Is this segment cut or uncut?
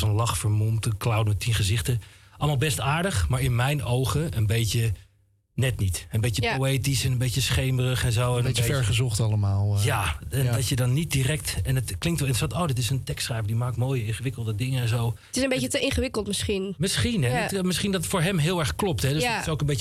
uncut